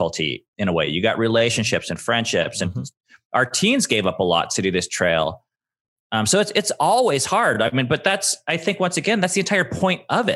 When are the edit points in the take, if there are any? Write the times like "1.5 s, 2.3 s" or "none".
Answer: none